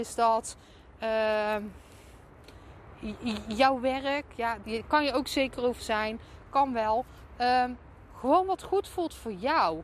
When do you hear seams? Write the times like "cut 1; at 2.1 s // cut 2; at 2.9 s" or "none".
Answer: cut 1; at 4.6 s